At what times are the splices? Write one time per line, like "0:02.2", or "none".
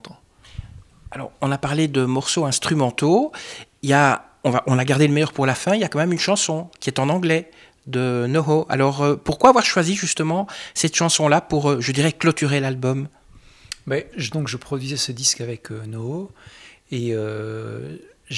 0:14.1